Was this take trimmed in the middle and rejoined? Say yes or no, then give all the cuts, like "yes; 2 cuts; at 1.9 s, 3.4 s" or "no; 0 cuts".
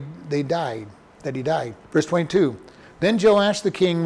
yes; 1 cut; at 1.8 s